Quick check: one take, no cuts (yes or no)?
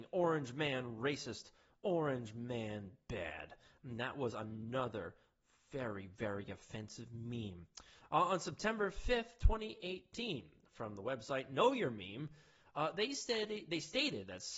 yes